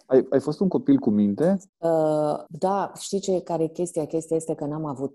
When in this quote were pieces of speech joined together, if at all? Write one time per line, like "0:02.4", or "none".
0:01.7